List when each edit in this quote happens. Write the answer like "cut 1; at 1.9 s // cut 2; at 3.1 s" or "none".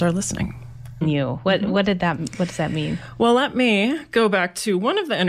cut 1; at 1.0 s